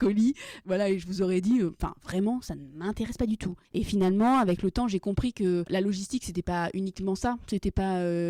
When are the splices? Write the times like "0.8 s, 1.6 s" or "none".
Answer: 3.6 s